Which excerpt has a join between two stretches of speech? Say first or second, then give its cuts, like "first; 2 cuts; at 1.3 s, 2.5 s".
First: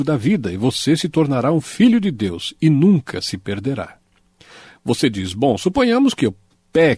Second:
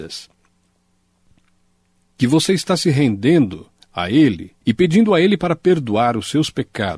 second; 1 cut; at 4.6 s